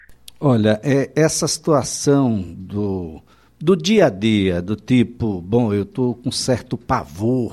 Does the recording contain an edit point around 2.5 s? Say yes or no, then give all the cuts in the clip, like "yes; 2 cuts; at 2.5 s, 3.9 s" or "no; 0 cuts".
no; 0 cuts